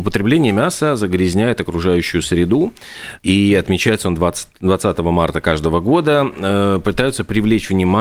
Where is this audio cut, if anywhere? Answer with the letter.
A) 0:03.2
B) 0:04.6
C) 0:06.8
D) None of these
A